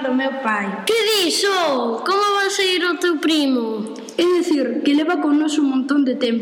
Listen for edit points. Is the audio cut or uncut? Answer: uncut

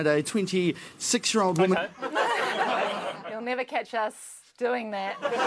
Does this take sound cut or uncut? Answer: cut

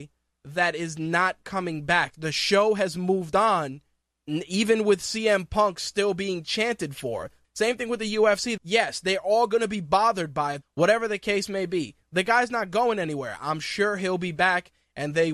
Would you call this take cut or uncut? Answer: cut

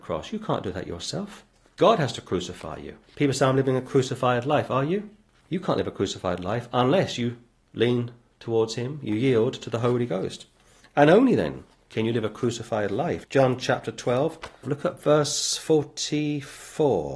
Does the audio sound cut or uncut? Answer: cut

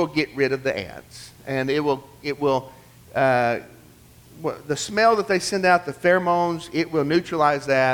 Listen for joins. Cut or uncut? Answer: uncut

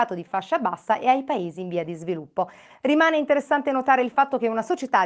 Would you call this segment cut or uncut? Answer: cut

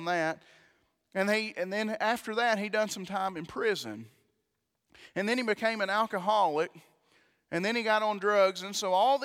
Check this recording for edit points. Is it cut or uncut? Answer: uncut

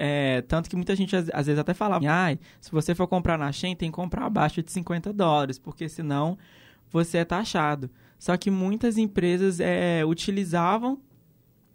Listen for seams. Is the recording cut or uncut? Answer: cut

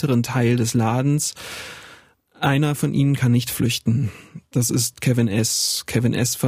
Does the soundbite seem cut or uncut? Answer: uncut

